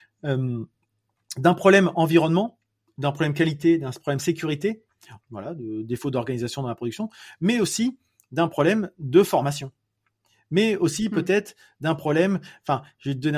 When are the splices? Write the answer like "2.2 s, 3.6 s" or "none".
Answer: 5.2 s